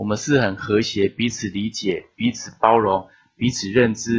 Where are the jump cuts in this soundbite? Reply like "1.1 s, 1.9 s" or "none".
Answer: none